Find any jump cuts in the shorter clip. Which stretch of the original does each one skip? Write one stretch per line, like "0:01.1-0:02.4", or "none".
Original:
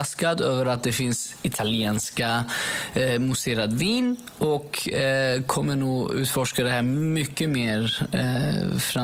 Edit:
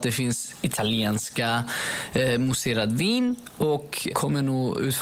0:04.9-0:05.4